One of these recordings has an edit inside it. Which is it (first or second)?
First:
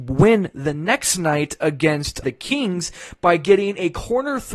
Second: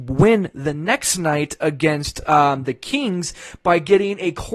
first